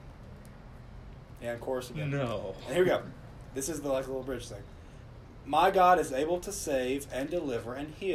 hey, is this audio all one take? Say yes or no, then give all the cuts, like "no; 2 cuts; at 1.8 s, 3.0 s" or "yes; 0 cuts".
yes; 0 cuts